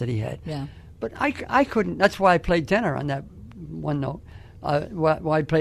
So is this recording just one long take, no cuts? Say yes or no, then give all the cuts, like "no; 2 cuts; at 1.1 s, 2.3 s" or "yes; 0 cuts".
yes; 0 cuts